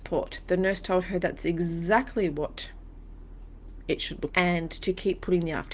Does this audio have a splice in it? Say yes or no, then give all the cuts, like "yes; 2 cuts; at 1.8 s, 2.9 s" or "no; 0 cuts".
yes; 1 cut; at 4.3 s